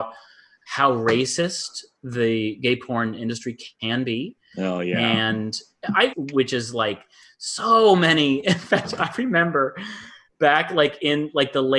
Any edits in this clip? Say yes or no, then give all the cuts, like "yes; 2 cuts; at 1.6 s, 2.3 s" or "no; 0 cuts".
yes; 1 cut; at 6.1 s